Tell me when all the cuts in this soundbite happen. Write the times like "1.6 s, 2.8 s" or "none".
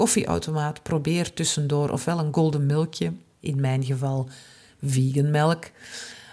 3.4 s